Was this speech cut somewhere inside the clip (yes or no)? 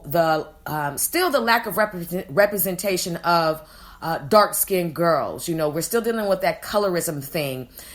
no